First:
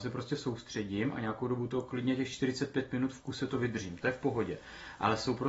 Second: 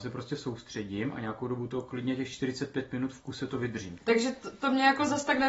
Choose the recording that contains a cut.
second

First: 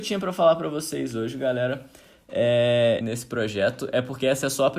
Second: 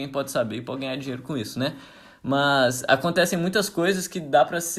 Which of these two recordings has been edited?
first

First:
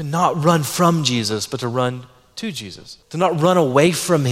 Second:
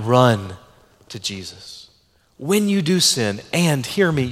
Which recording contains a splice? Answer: first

